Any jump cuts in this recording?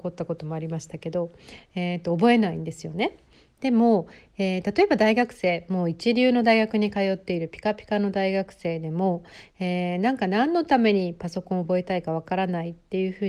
yes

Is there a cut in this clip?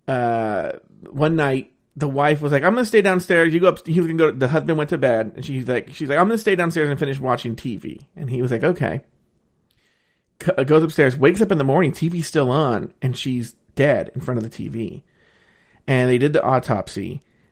no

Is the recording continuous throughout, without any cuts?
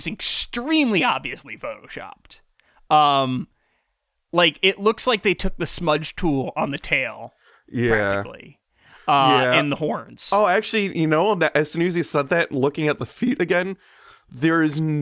yes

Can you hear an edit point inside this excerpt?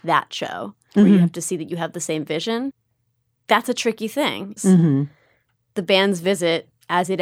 yes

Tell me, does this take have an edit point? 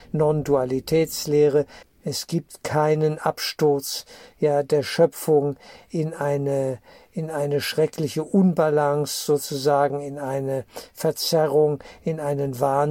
yes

